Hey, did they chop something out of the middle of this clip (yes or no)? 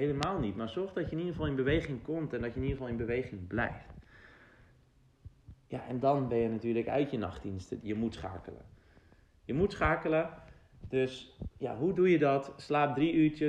yes